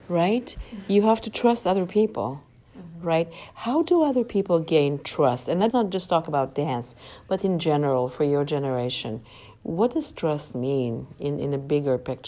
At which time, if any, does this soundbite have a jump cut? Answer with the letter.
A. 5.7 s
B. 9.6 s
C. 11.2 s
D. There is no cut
A